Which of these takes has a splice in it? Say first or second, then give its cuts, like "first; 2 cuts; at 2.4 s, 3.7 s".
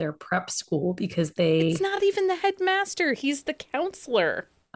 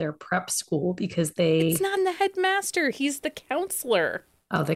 second; 1 cut; at 2.0 s